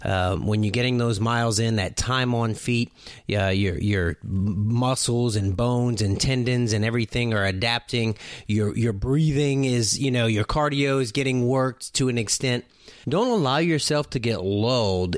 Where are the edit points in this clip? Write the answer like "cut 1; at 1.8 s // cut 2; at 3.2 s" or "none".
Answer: cut 1; at 13.0 s